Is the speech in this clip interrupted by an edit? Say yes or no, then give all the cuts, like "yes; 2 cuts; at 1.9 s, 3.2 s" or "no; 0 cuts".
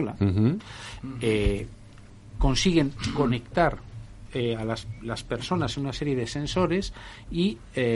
no; 0 cuts